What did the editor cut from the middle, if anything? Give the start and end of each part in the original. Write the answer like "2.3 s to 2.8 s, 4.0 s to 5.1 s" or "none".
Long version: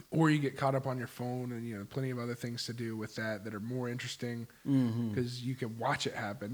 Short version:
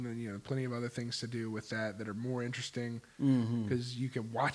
none